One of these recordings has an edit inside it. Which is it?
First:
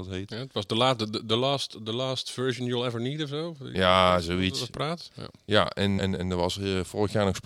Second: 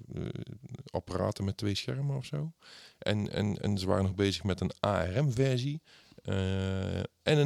first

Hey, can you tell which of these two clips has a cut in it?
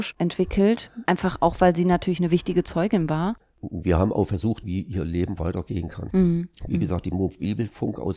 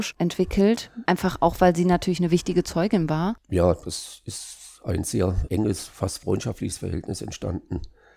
first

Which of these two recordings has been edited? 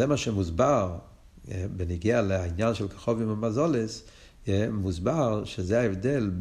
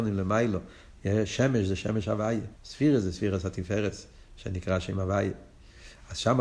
second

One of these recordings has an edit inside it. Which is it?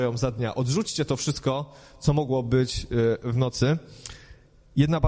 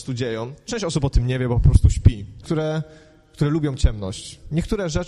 second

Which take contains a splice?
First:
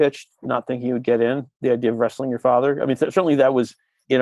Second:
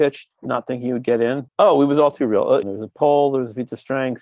second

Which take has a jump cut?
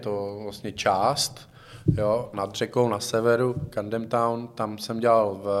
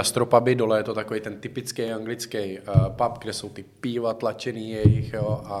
first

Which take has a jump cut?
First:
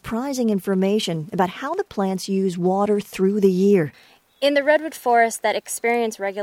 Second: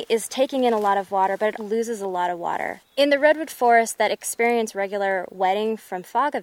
second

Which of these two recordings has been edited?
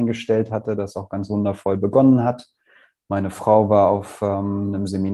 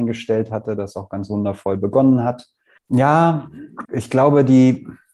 second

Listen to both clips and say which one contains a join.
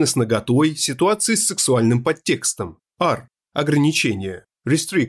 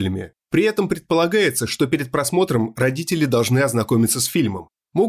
first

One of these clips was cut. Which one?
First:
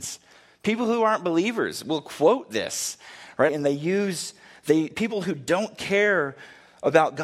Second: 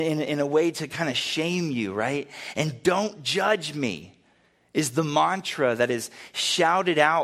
first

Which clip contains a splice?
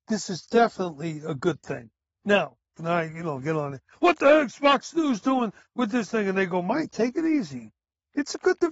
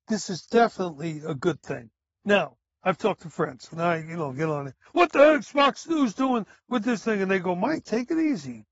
first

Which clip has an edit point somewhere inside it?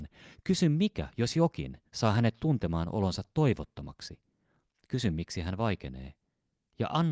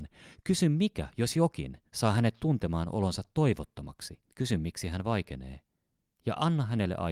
second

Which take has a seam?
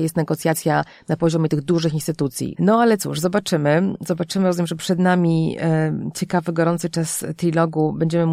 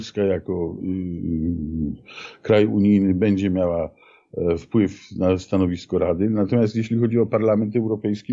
first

